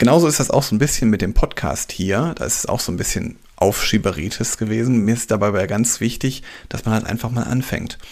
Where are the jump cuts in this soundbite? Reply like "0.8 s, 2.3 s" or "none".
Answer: none